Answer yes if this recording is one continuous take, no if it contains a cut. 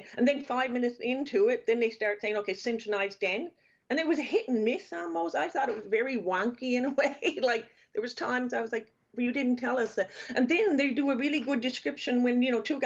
yes